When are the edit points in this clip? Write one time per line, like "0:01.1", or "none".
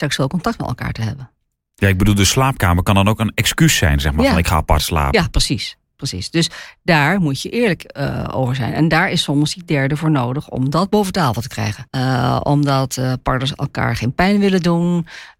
0:11.9